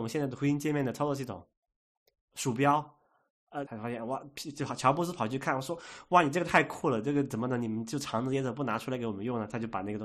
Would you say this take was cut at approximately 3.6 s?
yes; 1 cut; at 3.6 s

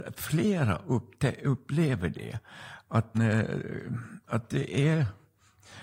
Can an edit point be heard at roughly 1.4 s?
no; 1 cut; at 3.1 s

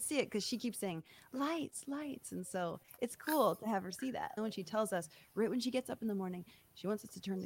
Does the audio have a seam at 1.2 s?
no; 1 cut; at 4.4 s

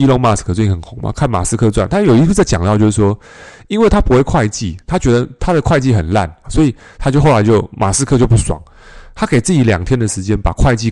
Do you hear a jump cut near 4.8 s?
no; 1 cut; at 6.4 s

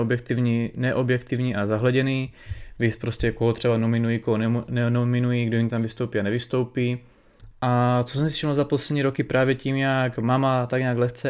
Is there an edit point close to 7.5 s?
yes; 1 cut; at 7.5 s

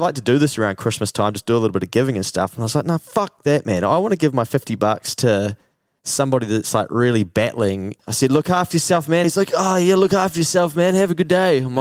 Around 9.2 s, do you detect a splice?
yes; 2 cuts; at 8.0 s, 9.2 s

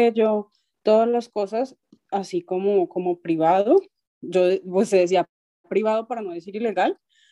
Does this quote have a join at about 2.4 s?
no; 0 cuts

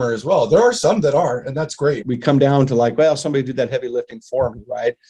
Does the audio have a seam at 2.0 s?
yes; 1 cut; at 2.0 s

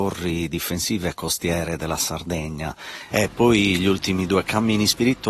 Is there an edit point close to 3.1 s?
yes; 1 cut; at 3.1 s

